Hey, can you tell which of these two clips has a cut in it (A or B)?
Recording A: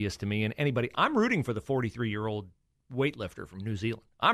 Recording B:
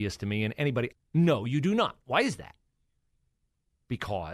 B